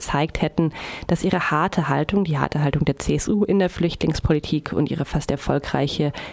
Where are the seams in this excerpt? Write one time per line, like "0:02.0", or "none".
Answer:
none